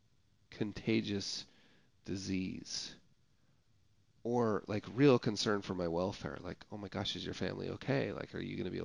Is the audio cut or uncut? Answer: uncut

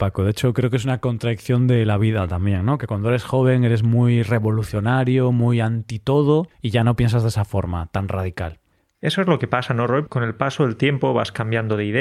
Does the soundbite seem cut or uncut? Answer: cut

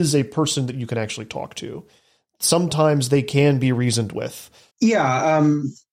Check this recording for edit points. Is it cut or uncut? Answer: cut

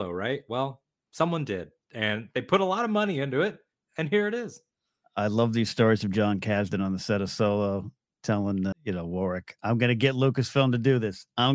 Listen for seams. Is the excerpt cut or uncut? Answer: cut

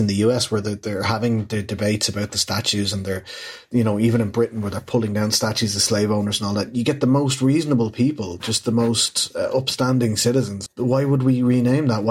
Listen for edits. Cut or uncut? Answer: cut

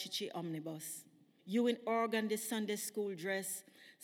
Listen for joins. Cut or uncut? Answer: cut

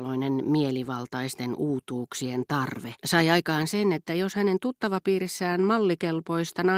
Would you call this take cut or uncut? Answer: cut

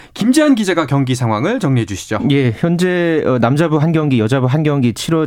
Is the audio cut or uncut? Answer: uncut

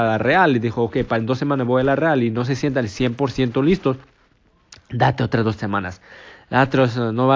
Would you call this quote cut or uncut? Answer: uncut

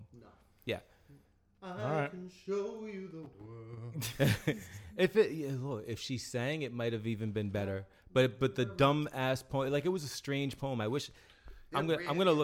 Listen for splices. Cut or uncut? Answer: uncut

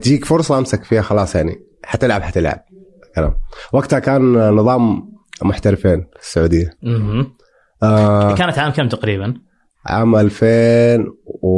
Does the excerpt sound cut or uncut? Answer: uncut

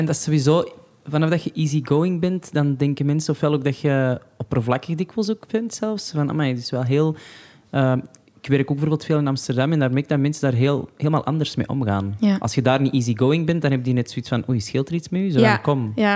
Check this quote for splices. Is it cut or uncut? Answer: uncut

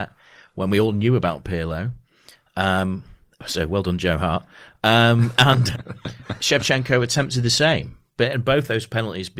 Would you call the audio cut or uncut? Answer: cut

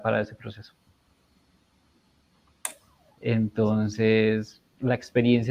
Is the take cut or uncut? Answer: cut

